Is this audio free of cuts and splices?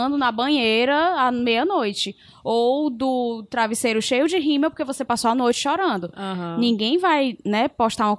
yes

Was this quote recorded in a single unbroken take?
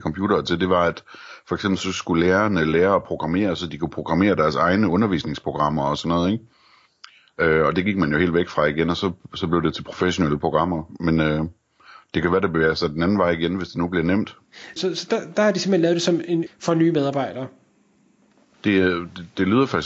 no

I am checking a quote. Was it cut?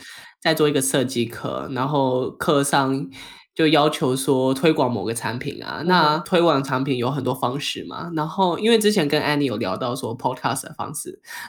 no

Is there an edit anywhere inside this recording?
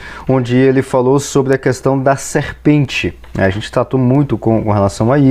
no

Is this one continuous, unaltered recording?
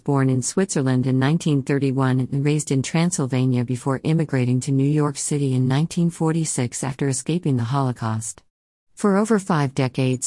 no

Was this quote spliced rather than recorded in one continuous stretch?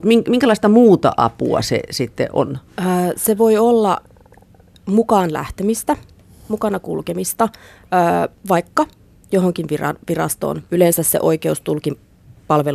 yes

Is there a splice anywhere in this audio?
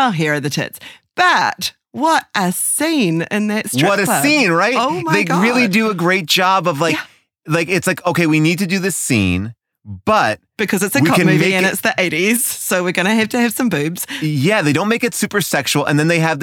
no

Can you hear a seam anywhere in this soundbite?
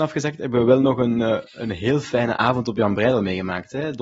no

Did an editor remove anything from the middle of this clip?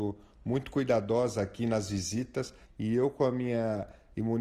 yes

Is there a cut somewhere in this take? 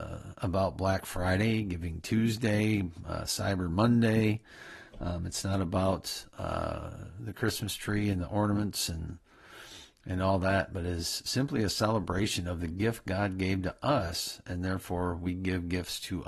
no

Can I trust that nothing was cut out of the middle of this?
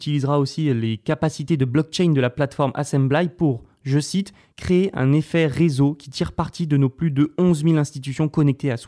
yes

